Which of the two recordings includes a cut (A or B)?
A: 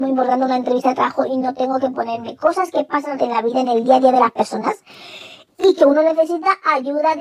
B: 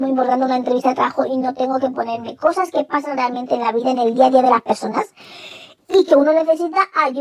A